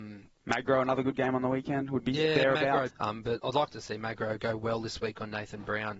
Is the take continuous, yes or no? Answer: no